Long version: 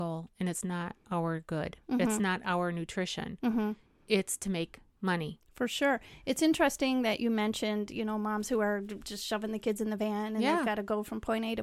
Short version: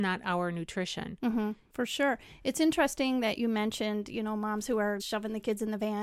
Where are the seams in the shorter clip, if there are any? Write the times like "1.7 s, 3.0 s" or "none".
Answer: 1.7 s, 5.0 s